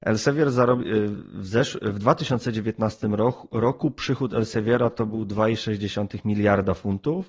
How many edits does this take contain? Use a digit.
0